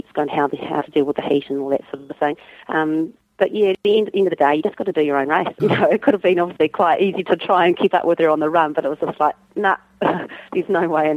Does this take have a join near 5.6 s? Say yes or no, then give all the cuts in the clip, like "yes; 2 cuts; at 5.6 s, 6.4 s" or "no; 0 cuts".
yes; 1 cut; at 5.6 s